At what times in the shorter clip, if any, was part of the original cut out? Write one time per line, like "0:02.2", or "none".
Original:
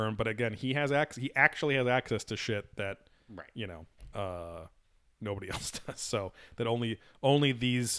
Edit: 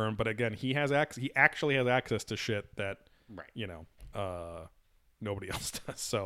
none